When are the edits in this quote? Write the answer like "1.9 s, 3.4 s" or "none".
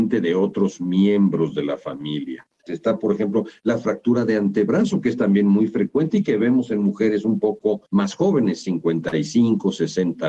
2.7 s, 7.9 s